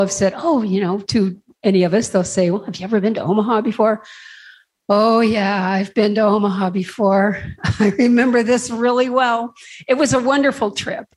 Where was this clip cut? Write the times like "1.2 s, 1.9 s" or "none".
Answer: none